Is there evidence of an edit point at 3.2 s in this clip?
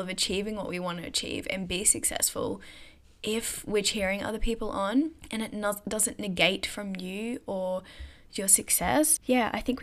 no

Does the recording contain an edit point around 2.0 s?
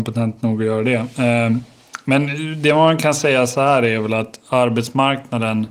no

